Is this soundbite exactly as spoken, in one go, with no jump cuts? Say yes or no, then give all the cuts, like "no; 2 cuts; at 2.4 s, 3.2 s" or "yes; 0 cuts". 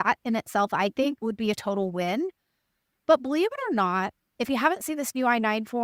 yes; 0 cuts